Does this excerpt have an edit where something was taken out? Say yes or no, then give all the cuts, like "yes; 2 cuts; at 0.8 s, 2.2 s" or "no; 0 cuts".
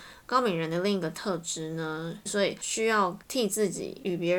yes; 1 cut; at 2.3 s